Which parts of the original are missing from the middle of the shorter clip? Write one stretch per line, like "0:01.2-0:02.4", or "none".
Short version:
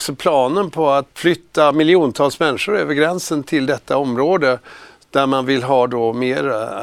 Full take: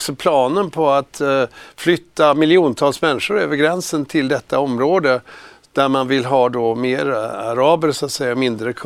0:01.1-0:01.7